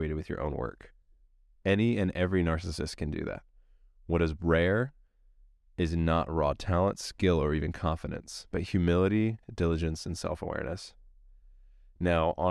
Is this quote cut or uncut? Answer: uncut